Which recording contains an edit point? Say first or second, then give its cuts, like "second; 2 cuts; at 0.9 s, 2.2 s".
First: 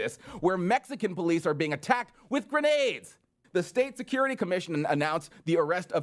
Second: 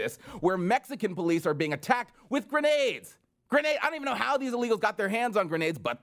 first; 1 cut; at 3.4 s